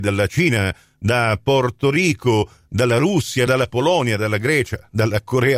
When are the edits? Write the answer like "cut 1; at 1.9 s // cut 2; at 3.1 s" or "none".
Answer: none